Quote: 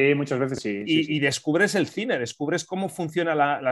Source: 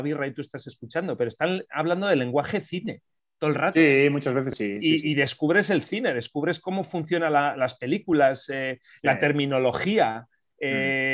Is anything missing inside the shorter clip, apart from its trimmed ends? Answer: no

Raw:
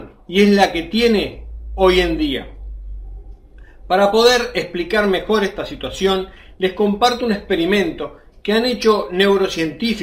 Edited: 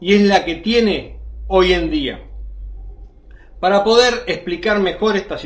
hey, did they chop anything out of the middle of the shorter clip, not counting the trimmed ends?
no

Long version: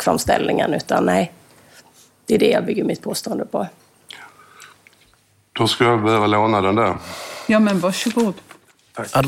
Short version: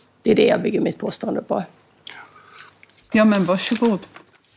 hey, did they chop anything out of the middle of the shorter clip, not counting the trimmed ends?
yes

